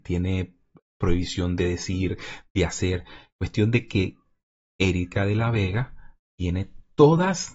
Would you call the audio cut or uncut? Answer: uncut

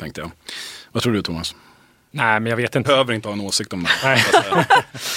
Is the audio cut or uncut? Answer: cut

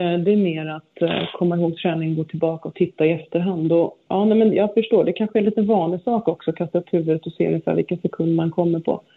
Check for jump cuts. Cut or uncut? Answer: cut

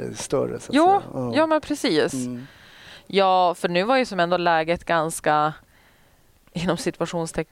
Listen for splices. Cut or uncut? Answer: uncut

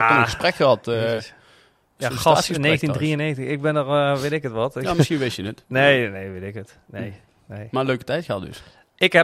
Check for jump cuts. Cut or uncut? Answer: uncut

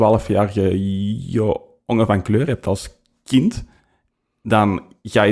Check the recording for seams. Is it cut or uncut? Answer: uncut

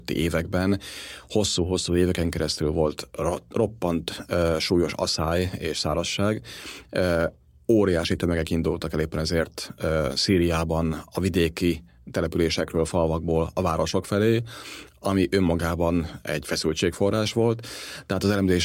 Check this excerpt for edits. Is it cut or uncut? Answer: uncut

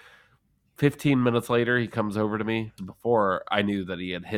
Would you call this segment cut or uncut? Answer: cut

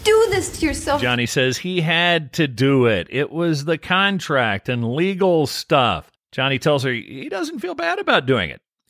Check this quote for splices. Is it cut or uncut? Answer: uncut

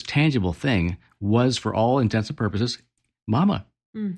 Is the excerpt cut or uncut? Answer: uncut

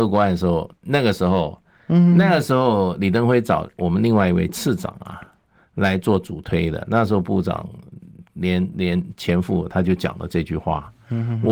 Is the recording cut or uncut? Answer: cut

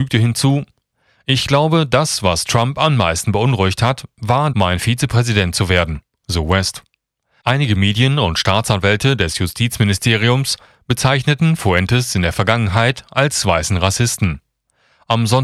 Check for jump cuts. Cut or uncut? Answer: cut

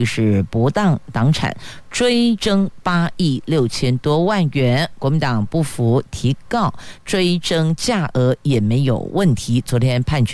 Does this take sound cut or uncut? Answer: cut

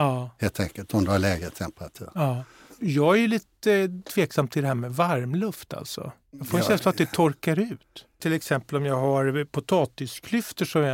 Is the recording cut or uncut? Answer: uncut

